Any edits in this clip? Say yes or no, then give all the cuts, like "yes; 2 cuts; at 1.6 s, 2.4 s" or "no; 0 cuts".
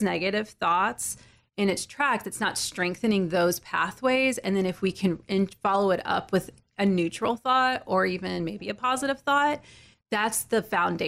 no; 0 cuts